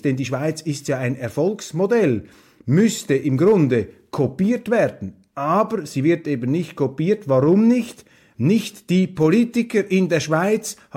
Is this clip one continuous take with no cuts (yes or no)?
no